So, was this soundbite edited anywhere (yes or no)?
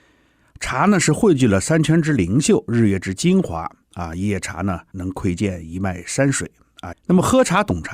yes